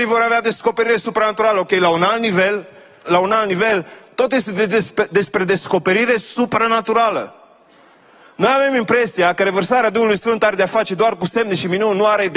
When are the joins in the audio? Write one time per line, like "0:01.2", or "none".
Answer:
0:03.1